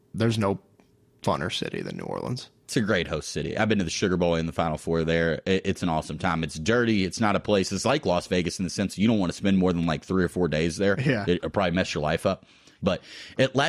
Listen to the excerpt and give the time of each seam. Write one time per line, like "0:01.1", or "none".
none